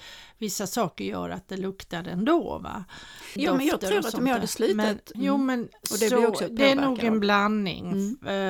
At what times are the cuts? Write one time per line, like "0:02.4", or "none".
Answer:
0:03.4
0:05.1